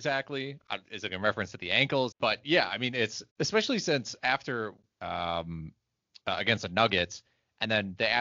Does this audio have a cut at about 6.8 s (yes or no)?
no